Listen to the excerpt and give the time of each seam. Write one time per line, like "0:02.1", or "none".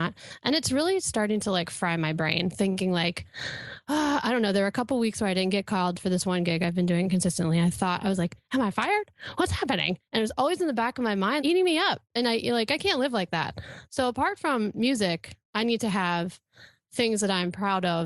0:11.4